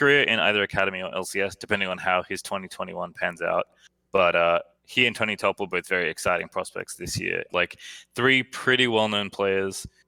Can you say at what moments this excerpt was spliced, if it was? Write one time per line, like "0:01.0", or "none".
0:07.5